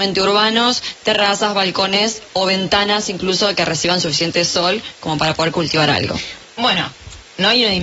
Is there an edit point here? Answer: yes; 1 cut; at 6.4 s

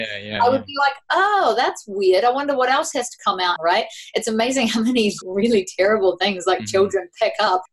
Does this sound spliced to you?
yes; 2 cuts; at 3.6 s, 5.2 s

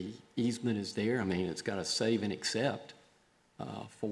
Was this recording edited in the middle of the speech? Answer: no; 0 cuts

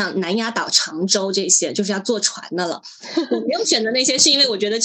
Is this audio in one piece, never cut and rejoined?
yes; 0 cuts

